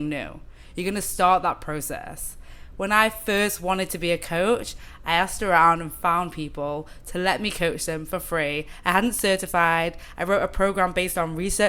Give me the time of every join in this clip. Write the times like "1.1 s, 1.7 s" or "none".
none